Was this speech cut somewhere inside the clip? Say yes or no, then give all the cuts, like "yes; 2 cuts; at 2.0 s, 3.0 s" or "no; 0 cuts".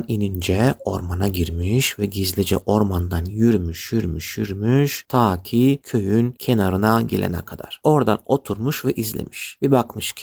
no; 0 cuts